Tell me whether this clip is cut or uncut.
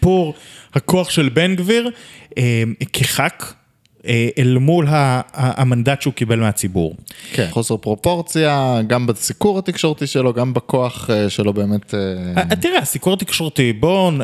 cut